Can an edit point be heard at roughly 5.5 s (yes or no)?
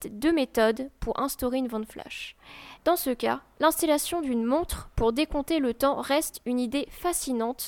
no